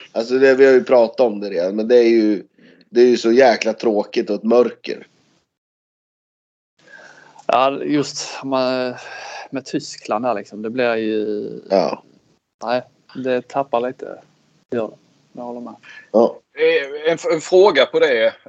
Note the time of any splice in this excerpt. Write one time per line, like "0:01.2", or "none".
none